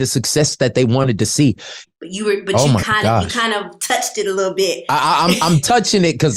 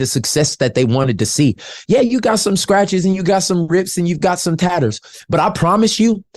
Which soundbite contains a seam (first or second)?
first